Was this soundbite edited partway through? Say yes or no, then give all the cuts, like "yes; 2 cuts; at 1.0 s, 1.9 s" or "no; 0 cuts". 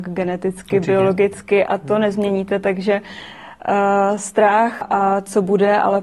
yes; 1 cut; at 4.8 s